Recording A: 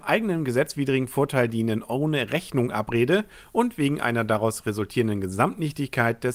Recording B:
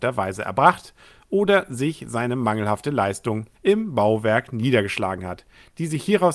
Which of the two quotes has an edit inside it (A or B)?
B